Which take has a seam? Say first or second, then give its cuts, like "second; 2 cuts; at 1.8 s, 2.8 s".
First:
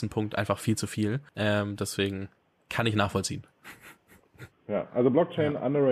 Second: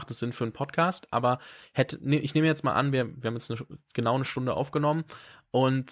first; 2 cuts; at 1.3 s, 4.5 s